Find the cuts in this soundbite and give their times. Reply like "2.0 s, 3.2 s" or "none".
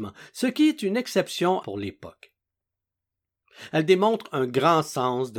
1.6 s